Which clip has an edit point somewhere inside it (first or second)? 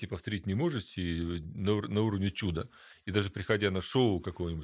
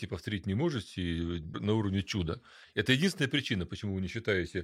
second